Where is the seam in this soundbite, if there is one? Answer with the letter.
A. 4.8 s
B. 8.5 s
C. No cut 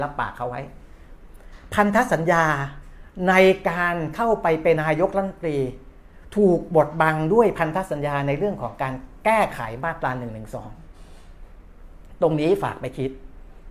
A